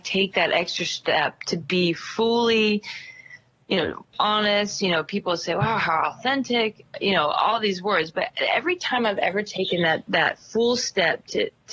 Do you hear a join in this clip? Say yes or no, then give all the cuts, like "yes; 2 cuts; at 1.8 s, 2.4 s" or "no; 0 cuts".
yes; 1 cut; at 4.1 s